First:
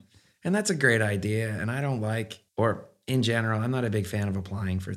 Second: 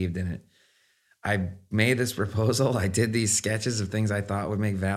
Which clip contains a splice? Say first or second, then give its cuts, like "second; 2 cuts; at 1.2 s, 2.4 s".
first; 1 cut; at 2.5 s